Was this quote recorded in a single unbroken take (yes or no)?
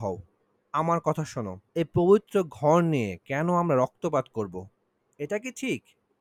no